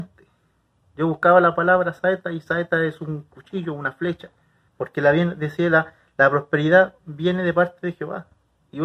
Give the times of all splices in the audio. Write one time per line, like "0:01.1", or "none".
0:04.7